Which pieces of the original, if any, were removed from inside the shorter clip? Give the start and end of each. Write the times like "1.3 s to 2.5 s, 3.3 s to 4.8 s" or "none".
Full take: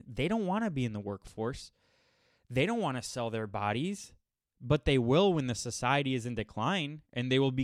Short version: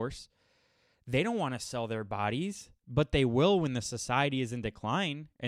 4.2 s to 4.5 s

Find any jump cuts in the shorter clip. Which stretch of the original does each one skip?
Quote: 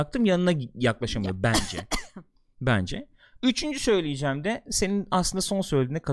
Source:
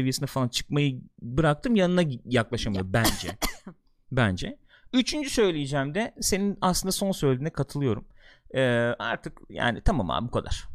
none

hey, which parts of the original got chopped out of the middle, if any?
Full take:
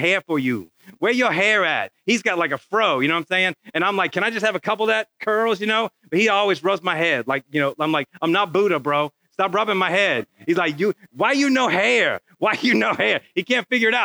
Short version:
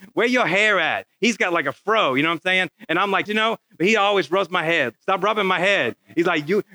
4.1 s to 5.6 s, 7.2 s to 9.2 s

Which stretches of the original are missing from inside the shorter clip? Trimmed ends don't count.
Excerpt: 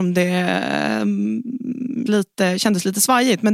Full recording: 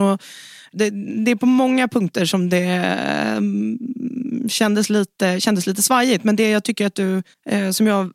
4.4 s to 4.9 s

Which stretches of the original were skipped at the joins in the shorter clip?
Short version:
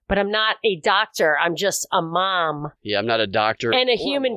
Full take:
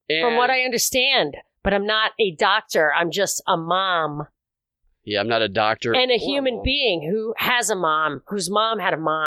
4.3 s to 5.0 s

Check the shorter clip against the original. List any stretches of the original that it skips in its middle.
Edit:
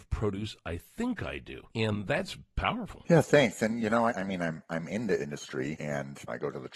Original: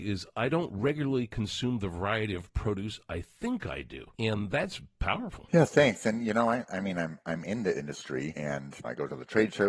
6.5 s to 6.7 s

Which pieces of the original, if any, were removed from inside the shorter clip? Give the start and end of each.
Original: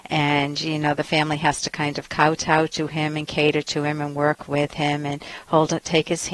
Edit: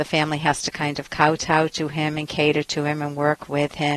none

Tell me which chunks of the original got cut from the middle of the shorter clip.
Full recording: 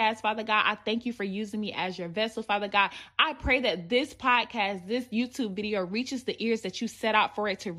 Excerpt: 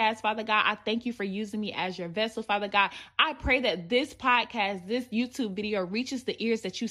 none

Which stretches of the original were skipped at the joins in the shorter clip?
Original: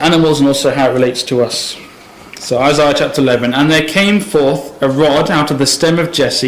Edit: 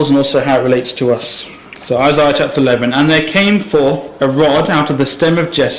2.0 s to 2.3 s

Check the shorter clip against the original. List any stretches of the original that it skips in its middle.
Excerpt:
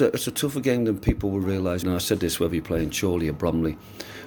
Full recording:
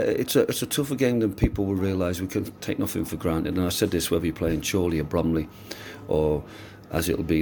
2.2 s to 3.5 s

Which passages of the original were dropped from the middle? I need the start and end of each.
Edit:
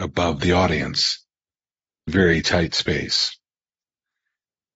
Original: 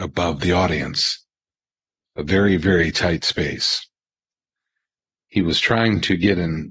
2.1 s to 2.6 s

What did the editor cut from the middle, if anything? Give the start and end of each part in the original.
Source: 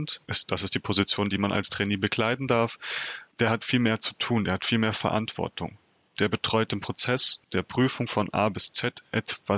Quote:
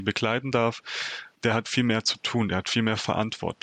none

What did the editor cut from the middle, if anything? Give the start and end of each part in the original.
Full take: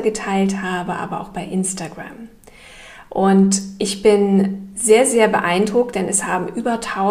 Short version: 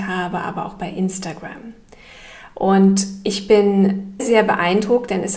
4.7 s to 5.0 s

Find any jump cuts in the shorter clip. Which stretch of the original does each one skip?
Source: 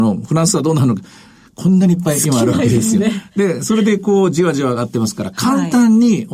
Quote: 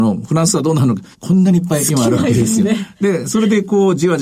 1.1 s to 1.5 s

